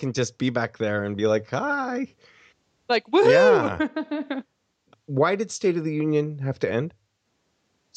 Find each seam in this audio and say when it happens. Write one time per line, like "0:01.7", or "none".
none